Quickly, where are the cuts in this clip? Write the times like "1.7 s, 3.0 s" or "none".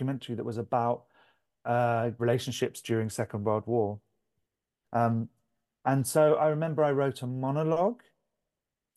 2.2 s, 4.8 s